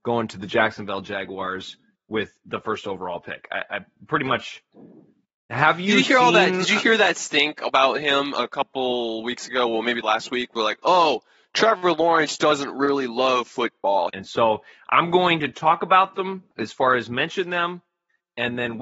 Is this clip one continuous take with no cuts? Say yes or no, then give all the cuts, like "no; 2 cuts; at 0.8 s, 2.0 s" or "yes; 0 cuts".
no; 2 cuts; at 14.1 s, 16.5 s